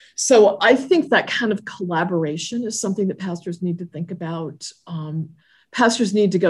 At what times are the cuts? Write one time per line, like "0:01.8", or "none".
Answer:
none